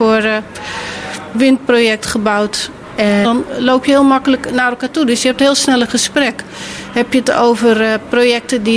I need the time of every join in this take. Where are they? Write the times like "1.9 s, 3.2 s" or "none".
1.3 s, 3.2 s